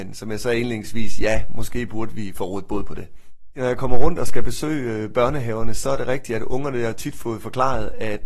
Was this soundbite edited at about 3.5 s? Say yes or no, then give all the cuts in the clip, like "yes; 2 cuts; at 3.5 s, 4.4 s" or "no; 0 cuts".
no; 0 cuts